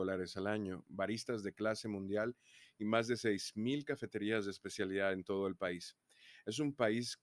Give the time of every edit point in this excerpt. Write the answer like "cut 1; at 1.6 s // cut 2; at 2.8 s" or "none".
none